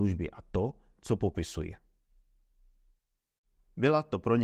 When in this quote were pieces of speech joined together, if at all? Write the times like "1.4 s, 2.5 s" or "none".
none